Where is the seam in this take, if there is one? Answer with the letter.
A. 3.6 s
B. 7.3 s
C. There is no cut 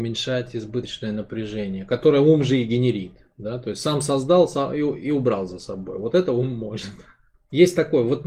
B